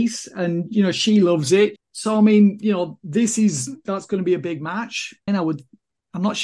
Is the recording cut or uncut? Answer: cut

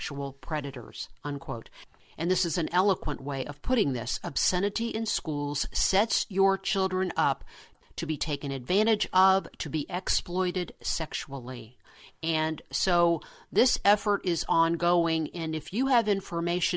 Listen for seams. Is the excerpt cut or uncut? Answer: uncut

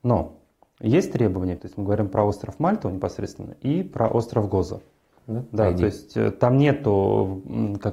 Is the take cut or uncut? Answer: cut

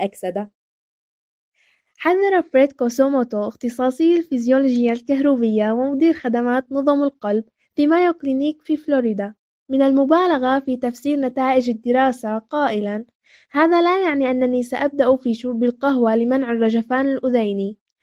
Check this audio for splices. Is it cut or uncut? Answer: uncut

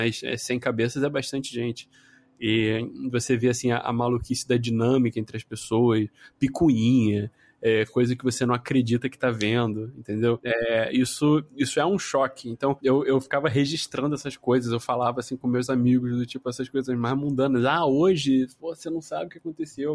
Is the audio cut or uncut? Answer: uncut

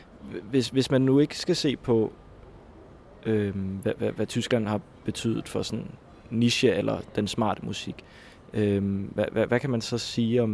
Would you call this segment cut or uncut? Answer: uncut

